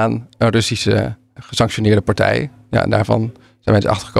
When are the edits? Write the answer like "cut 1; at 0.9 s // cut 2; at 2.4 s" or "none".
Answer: cut 1; at 1.4 s